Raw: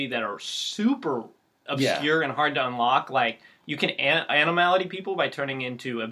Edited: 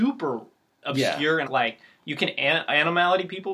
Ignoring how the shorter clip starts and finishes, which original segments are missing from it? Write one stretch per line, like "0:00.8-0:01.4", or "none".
0:02.3-0:03.1